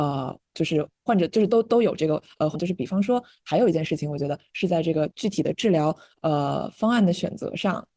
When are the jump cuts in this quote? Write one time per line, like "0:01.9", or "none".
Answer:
0:01.1
0:02.5